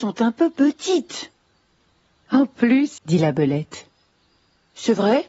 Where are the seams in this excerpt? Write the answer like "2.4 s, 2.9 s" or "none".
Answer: 3.0 s